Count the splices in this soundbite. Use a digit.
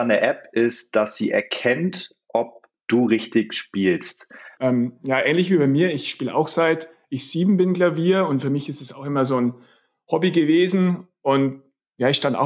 1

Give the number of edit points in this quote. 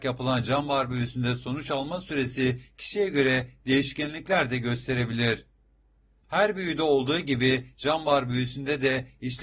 1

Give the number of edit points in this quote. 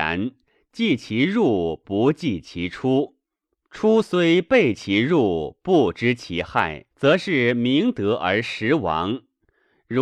1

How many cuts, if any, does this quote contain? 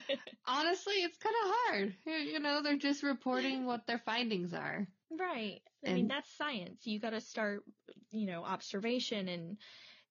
0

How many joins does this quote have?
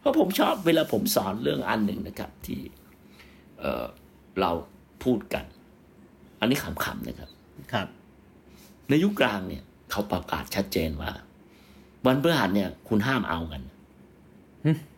0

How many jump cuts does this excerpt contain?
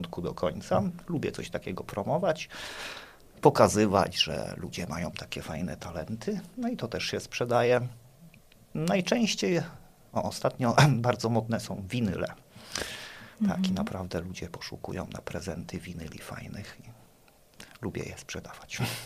0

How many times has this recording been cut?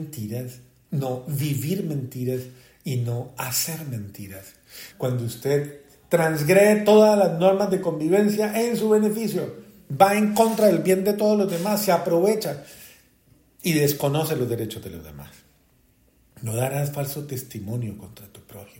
1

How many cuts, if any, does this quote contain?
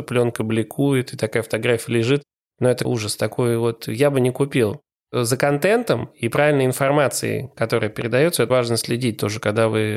2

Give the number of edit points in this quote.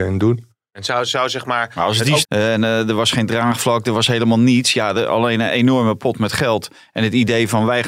2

